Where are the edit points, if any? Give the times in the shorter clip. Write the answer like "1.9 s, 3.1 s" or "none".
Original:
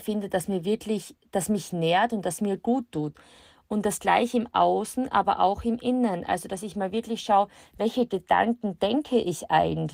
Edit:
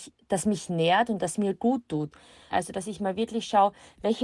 2.5 s